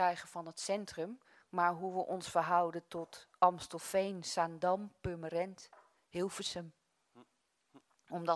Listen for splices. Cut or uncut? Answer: uncut